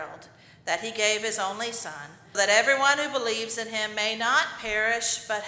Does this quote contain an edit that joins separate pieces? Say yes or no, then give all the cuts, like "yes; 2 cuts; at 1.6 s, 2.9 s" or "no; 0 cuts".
yes; 1 cut; at 2.3 s